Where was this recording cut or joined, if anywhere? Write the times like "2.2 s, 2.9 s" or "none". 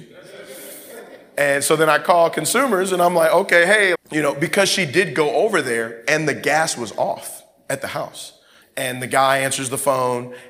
3.9 s, 8.6 s